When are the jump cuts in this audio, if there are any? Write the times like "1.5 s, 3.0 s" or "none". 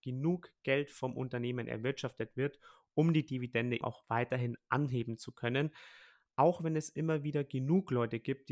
3.8 s